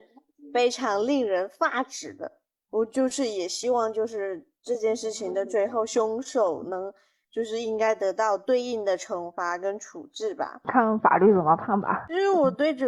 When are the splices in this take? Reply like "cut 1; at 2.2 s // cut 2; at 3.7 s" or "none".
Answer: none

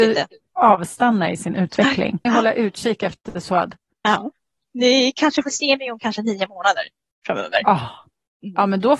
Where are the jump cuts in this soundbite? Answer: cut 1; at 2.3 s // cut 2; at 4.6 s

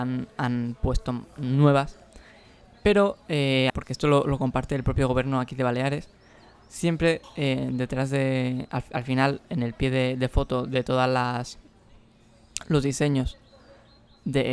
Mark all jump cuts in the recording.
cut 1; at 3.7 s

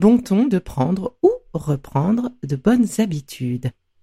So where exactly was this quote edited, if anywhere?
none

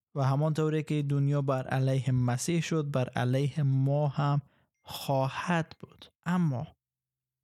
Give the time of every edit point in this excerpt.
cut 1; at 6.1 s

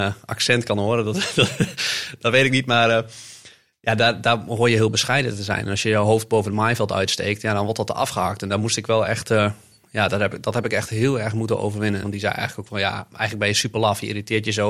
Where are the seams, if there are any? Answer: cut 1; at 12.0 s

